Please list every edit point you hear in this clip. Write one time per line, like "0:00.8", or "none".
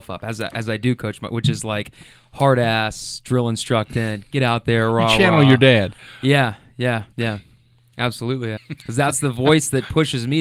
0:07.1
0:08.6